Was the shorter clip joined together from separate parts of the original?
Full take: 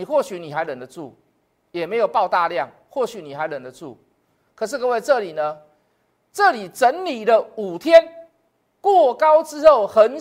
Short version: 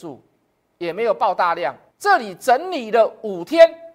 yes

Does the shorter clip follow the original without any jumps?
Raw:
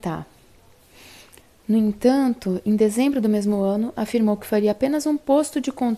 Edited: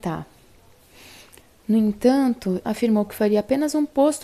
no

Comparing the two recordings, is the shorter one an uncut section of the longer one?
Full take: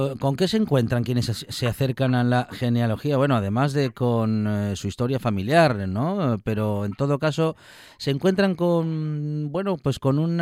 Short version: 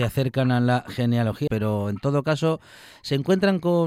no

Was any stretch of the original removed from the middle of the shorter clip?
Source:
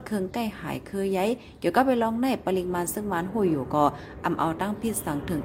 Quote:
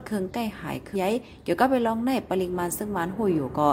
yes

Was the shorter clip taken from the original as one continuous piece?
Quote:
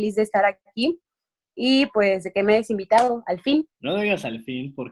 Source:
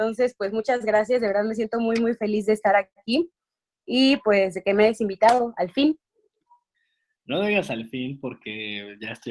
no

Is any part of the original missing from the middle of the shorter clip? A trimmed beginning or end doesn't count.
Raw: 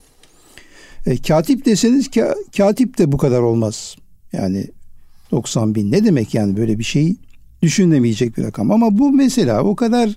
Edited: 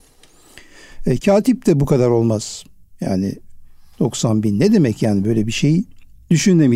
yes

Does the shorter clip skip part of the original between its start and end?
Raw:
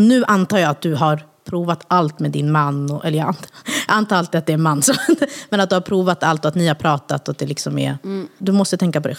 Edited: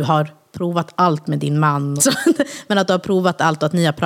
yes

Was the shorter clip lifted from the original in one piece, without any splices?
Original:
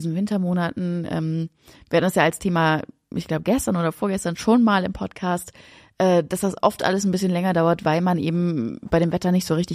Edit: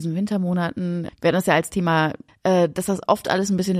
no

